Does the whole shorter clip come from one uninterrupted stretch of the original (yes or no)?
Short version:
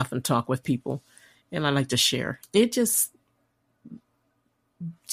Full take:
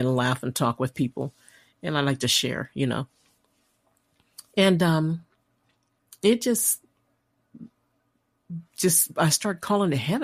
no